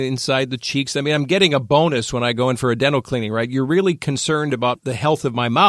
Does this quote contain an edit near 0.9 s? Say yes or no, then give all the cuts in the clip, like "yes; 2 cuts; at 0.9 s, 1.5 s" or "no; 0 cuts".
no; 0 cuts